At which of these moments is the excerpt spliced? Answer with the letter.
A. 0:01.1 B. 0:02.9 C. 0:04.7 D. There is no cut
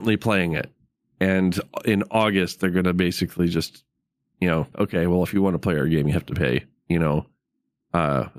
C